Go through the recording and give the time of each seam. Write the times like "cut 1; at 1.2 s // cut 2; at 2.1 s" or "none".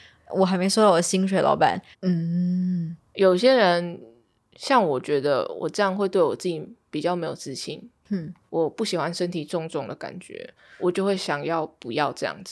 cut 1; at 1.9 s